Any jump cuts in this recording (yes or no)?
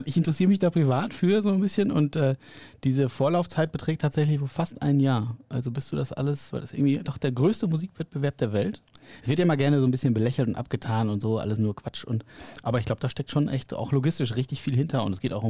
no